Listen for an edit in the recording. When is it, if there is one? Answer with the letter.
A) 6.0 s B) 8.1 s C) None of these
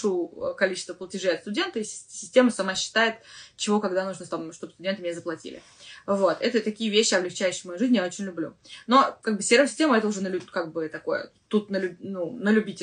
C